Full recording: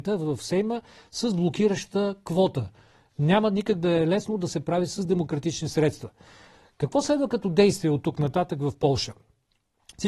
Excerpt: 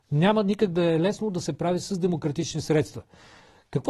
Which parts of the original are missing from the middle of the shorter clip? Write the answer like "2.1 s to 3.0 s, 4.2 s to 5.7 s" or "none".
none